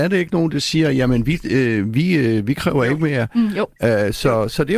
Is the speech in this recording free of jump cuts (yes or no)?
yes